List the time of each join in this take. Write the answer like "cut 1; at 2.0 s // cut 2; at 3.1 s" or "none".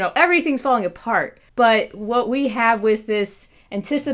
cut 1; at 1.5 s